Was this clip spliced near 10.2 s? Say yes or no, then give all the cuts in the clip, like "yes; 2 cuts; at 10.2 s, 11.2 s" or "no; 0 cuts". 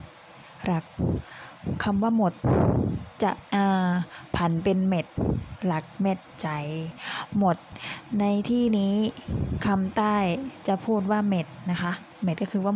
no; 1 cut; at 3.5 s